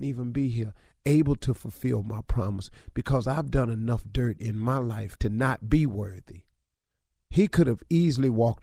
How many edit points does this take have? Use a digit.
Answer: 1